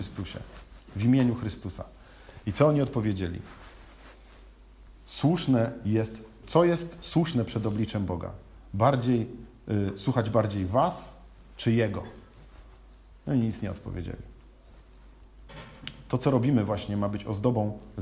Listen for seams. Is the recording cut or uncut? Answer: cut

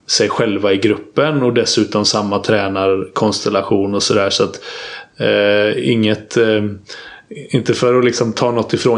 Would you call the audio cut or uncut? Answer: uncut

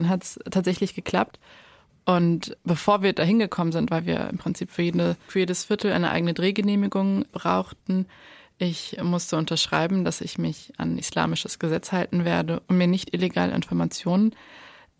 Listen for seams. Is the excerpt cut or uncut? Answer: cut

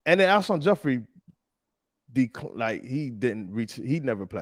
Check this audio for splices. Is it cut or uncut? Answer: uncut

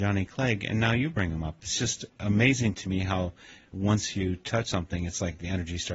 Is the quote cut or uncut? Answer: uncut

